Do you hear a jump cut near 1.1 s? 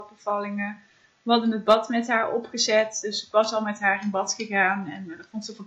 no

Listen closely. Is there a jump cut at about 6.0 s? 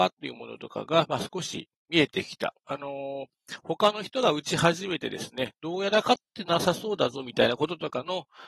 yes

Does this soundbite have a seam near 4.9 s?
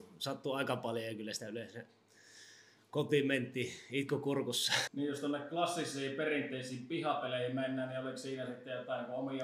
yes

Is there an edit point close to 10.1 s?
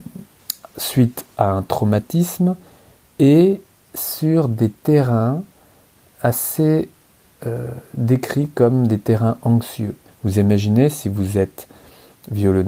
yes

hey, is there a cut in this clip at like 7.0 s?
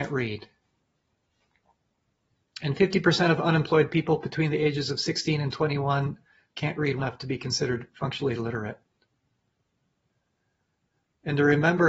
yes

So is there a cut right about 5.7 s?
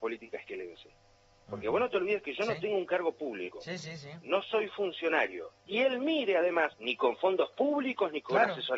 yes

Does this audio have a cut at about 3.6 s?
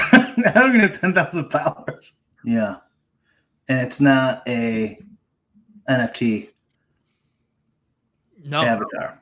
no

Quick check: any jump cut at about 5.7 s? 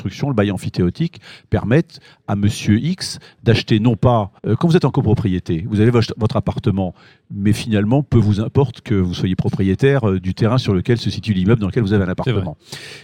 no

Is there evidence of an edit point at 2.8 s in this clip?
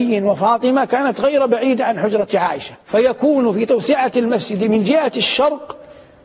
yes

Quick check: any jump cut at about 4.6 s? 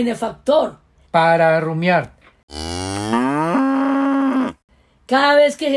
no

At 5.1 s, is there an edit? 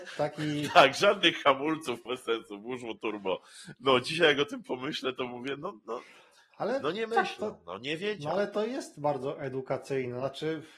no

